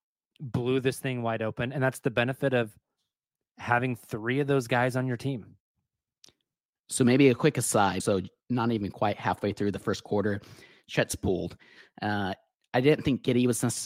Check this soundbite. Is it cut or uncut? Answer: cut